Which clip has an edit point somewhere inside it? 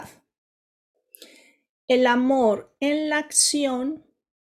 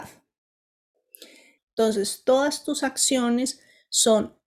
second; 1 cut; at 1.6 s

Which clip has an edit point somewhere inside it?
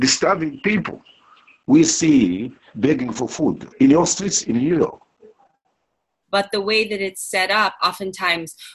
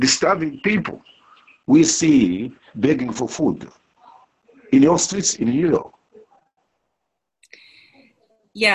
first; 3 cuts; at 3.7 s, 6.2 s, 7.8 s

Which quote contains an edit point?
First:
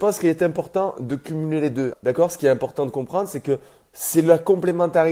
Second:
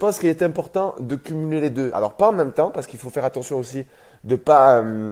first; 1 cut; at 1.9 s

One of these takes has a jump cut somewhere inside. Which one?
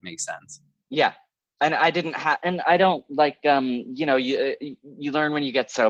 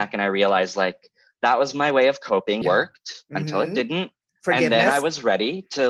second; 1 cut; at 2.6 s

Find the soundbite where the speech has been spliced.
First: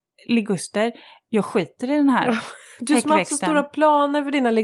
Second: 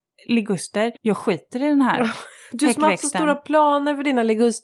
second; 1 cut; at 1.0 s

